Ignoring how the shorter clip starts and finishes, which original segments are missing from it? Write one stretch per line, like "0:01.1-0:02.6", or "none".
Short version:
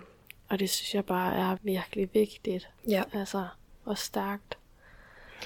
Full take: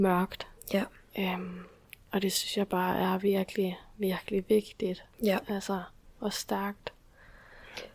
0:03.2-0:03.9